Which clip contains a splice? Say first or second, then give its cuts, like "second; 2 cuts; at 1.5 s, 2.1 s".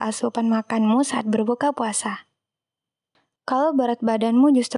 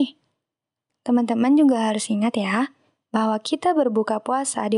first; 1 cut; at 3.4 s